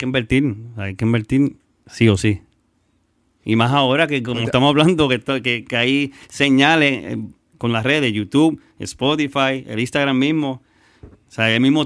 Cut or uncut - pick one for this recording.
uncut